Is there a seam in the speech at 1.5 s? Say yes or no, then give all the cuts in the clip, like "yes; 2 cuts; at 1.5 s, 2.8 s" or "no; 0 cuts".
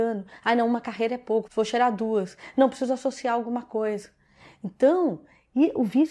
yes; 1 cut; at 1.5 s